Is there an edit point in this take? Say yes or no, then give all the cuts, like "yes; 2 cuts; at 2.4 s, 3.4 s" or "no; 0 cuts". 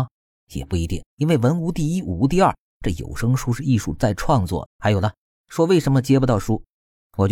yes; 2 cuts; at 1.1 s, 4.7 s